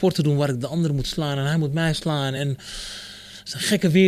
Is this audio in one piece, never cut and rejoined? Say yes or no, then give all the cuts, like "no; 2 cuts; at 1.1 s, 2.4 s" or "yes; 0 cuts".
yes; 0 cuts